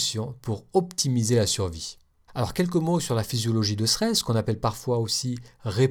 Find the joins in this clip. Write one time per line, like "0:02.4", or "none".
0:02.3